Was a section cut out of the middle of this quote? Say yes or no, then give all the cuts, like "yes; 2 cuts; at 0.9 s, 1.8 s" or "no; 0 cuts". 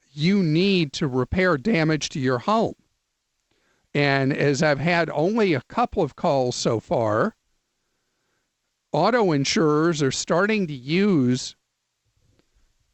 no; 0 cuts